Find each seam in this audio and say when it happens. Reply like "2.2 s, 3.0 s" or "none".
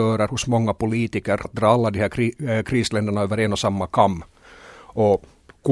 1.4 s